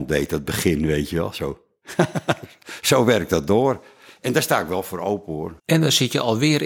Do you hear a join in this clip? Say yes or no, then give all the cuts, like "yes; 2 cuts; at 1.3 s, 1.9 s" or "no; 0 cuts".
yes; 1 cut; at 5.6 s